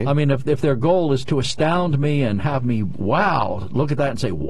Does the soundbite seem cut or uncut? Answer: uncut